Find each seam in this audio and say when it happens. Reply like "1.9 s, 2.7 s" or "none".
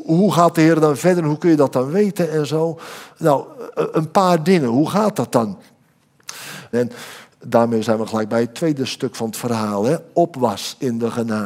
6.7 s